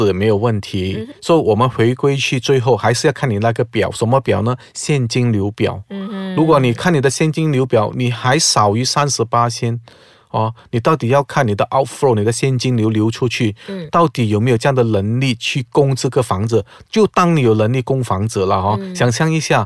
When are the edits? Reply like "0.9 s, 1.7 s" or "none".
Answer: none